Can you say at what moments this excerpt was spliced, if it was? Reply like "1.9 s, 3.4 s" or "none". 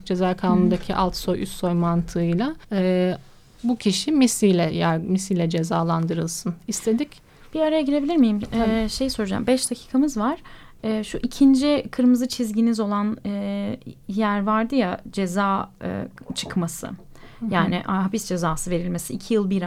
2.6 s